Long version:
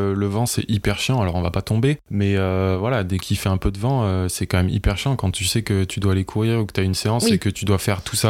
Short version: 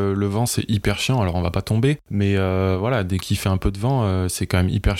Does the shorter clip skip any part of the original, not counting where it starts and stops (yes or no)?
no